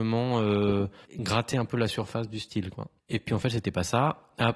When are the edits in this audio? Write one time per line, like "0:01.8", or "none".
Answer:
0:01.0
0:03.0